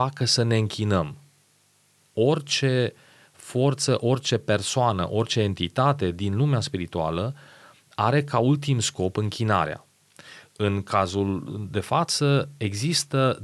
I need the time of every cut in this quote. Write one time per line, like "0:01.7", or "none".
none